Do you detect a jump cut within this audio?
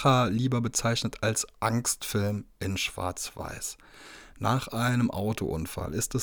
no; 0 cuts

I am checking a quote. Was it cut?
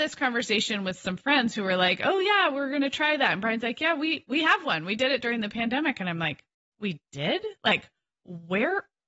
no; 0 cuts

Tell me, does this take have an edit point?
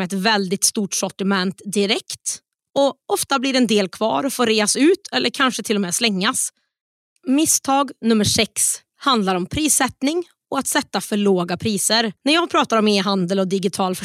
yes; 2 cuts; at 7.2 s, 12.2 s

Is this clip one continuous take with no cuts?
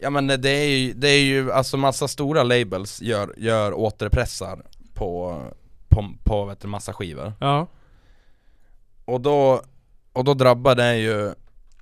yes; 0 cuts

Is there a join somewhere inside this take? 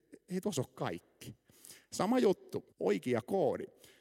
yes; 1 cut; at 2.7 s

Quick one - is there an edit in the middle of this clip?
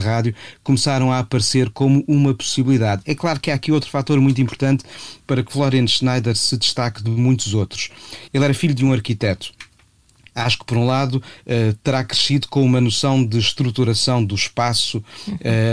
no; 0 cuts

